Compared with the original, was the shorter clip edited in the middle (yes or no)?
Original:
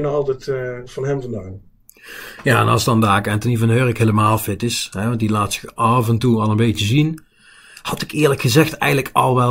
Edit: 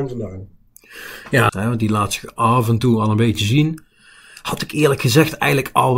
yes